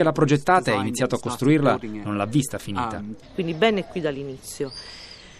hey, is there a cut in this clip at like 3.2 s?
yes; 1 cut; at 3.2 s

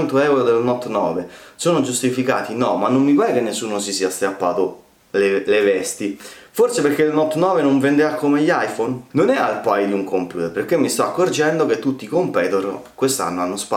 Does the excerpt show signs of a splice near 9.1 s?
yes; 1 cut; at 9.1 s

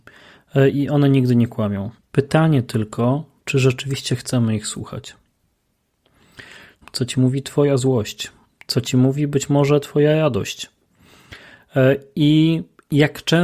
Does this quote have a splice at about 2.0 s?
yes; 2 cuts; at 2.0 s, 6.8 s

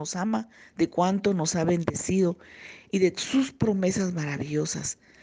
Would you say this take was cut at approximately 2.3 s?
no; 0 cuts

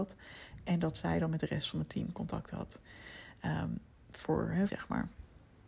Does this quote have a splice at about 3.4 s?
no; 1 cut; at 4.7 s

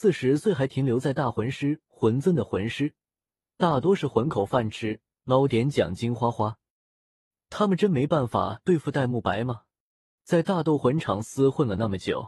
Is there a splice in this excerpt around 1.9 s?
no; 1 cut; at 10.2 s

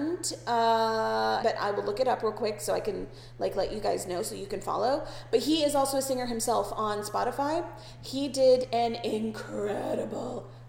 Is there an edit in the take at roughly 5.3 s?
no; 1 cut; at 1.4 s

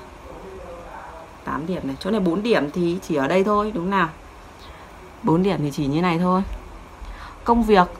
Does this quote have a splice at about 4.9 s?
no; 1 cut; at 3.0 s

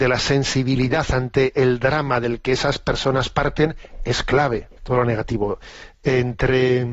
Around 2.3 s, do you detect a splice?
no; 1 cut; at 4.8 s

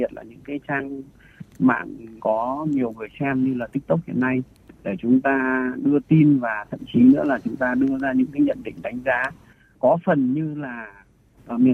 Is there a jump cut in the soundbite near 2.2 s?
yes; 1 cut; at 2.2 s

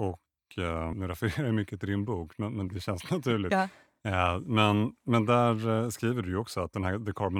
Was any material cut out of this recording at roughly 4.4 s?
no; 2 cuts; at 0.9 s, 2.7 s

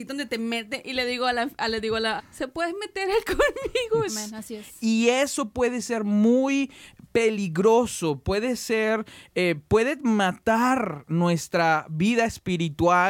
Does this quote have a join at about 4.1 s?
yes; 2 cuts; at 2.2 s, 4.1 s

